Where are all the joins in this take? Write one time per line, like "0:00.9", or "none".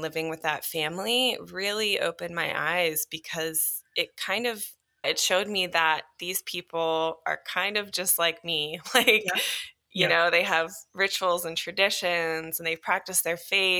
0:05.0